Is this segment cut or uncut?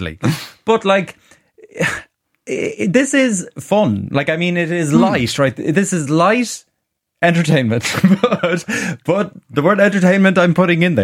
uncut